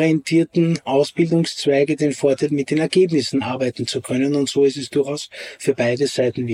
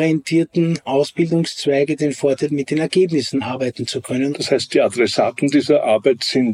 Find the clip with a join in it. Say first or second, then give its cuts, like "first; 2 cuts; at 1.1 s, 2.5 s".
second; 1 cut; at 4.3 s